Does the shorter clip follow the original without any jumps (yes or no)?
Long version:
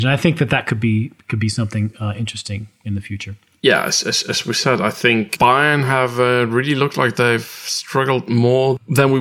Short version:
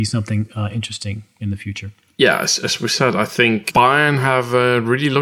no